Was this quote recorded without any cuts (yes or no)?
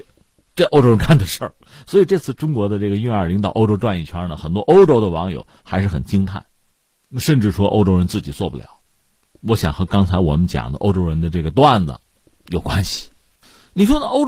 yes